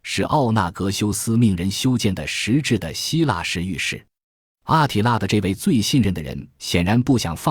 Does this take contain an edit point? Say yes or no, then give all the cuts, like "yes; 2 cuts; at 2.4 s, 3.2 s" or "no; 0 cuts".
no; 0 cuts